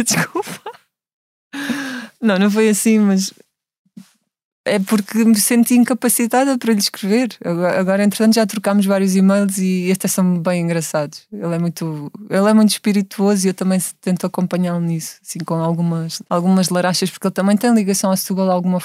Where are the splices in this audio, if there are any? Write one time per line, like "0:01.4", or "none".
0:16.2